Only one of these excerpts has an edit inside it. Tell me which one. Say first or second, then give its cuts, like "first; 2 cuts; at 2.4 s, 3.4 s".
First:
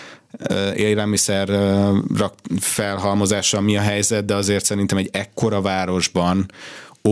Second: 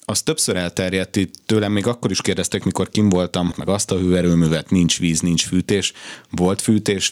second; 1 cut; at 3.5 s